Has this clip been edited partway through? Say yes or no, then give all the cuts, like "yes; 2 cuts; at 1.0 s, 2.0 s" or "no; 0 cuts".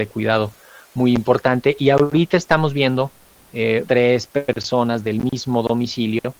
yes; 1 cut; at 3.8 s